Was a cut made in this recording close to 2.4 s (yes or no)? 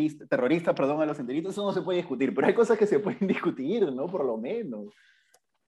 no